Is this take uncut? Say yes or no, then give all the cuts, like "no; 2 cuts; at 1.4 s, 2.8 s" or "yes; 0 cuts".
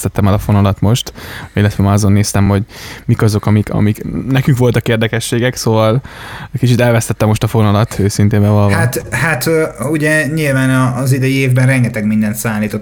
yes; 0 cuts